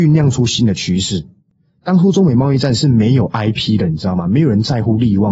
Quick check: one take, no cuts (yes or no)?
yes